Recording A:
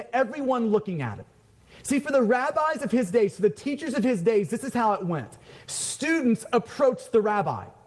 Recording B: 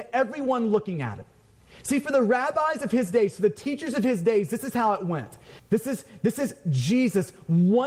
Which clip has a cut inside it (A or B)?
B